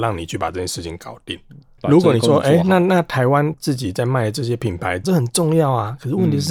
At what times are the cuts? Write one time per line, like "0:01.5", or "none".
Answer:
0:01.8
0:05.0